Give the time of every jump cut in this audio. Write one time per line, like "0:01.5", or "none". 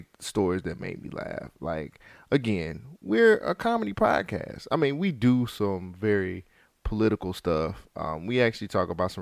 none

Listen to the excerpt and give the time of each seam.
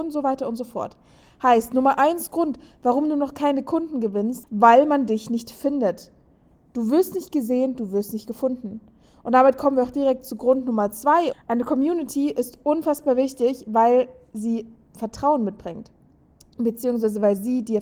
0:04.4
0:11.3

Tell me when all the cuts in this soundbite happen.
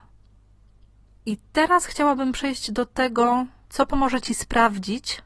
none

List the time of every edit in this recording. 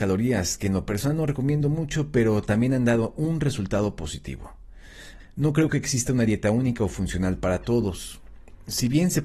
0:05.2

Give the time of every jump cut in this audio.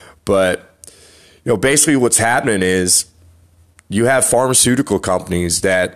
none

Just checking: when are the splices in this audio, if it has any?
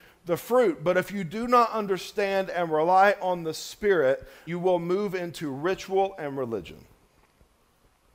0:04.5

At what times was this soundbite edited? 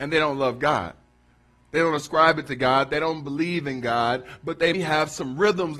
0:04.7

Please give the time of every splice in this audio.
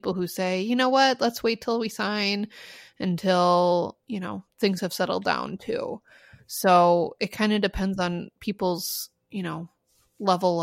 none

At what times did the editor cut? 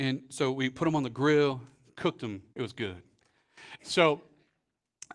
0:02.5
0:03.8

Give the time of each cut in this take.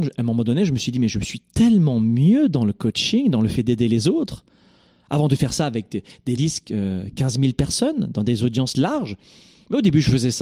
0:06.4

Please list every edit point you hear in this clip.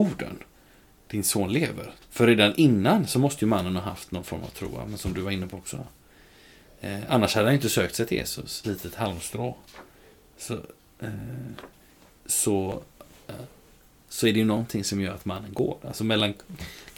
0:02.0
0:08.6

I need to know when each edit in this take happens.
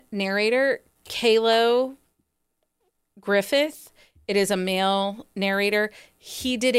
0:01.0

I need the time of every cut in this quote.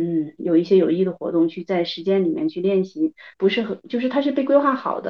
0:03.3

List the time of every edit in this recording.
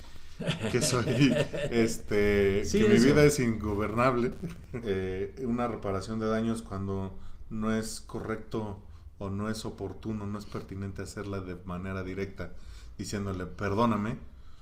0:04.8

